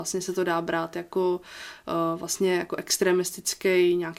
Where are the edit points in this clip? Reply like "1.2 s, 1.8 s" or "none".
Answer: none